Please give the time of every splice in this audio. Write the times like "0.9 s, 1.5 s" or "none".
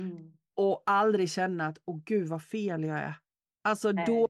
none